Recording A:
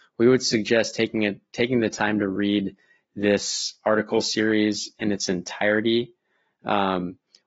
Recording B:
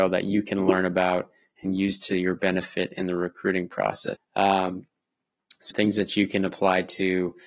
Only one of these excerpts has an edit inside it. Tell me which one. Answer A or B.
B